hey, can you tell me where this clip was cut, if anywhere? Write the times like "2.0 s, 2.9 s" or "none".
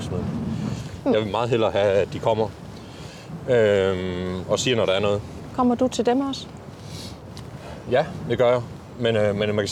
1.0 s

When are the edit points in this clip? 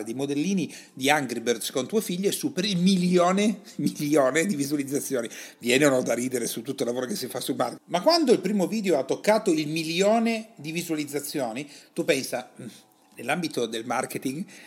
7.8 s

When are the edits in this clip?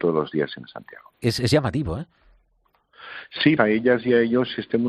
1.1 s, 3.6 s

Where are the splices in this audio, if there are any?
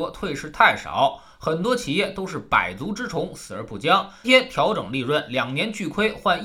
4.2 s

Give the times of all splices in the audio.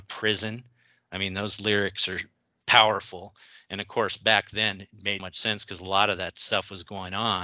2.6 s, 5.2 s

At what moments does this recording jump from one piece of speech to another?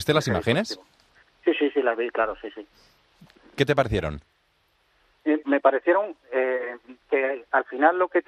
5.4 s, 7.0 s

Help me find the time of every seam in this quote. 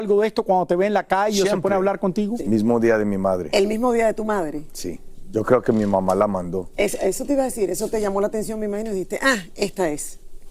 2.4 s

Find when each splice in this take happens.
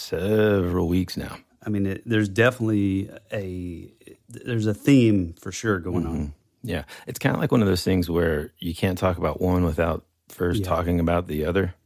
1.5 s

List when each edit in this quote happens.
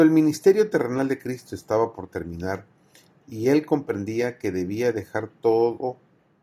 none

